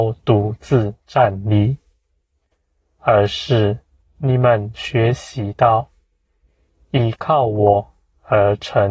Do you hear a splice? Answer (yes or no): no